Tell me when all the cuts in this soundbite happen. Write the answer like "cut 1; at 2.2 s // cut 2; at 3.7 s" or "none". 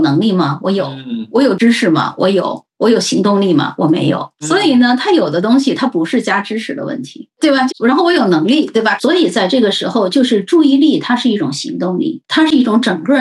cut 1; at 7.7 s // cut 2; at 9.0 s // cut 3; at 12.2 s